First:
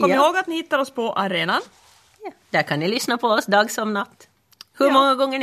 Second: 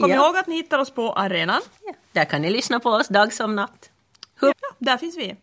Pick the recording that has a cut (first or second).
second